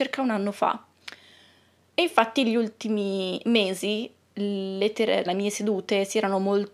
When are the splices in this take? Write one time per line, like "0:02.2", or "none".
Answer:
0:05.3